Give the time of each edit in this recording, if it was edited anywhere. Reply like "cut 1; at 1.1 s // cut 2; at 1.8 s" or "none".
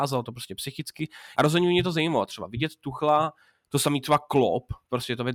cut 1; at 1.3 s